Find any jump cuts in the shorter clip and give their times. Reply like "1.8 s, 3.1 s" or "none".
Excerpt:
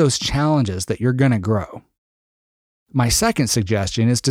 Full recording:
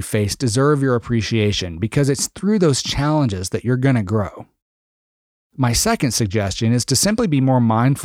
none